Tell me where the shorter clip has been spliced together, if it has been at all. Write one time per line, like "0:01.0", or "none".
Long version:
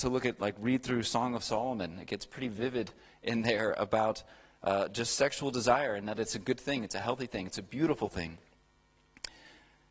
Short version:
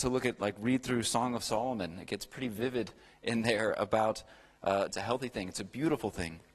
0:04.9